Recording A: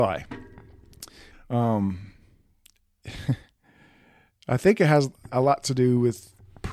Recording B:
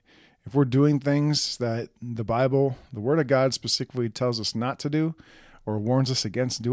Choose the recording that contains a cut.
A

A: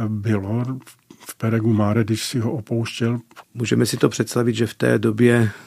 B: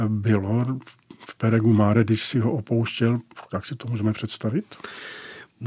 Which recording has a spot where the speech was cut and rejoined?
A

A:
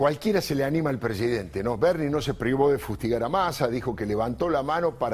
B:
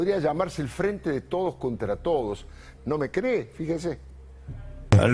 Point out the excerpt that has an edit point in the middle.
B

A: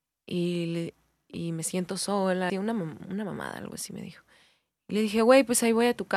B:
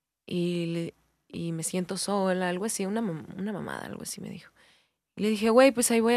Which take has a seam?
A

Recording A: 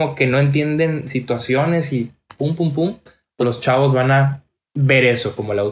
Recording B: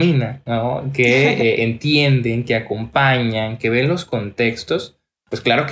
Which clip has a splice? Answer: A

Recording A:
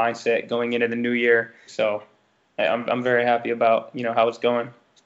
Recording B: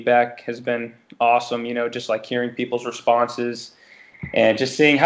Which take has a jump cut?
A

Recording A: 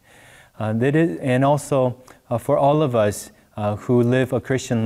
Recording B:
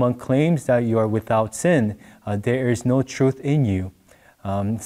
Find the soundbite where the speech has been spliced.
A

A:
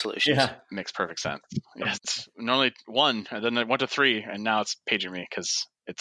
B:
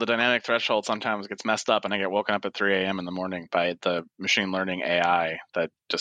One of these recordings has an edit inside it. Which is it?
A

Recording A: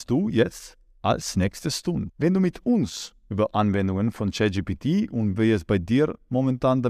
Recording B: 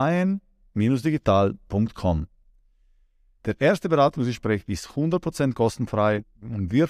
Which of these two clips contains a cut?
A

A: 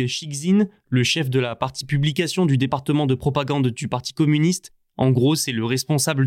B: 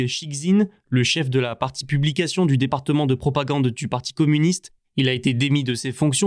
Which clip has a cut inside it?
B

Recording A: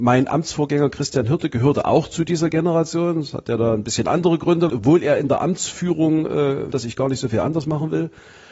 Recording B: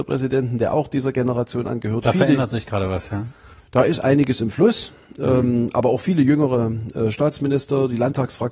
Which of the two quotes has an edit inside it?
A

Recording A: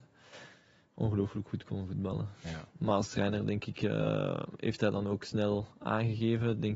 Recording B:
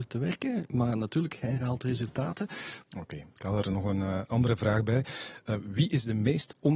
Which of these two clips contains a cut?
B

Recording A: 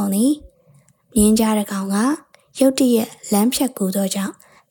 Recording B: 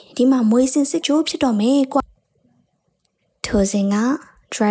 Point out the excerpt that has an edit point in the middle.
B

